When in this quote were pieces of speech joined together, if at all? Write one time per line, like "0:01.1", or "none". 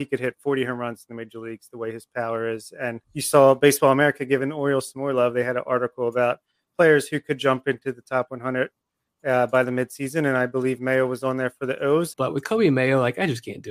0:03.0
0:12.1